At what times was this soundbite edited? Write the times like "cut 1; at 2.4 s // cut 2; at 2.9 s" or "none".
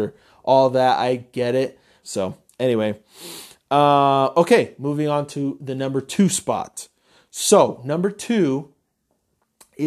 cut 1; at 2.0 s